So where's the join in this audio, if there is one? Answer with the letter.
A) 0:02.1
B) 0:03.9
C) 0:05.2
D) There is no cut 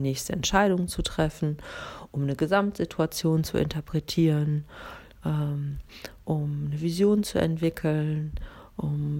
D